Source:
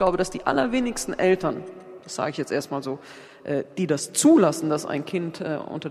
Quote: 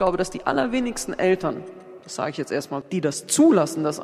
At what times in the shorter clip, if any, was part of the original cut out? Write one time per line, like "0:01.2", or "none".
0:02.8